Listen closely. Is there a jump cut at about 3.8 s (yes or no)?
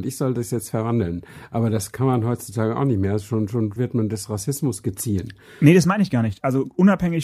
yes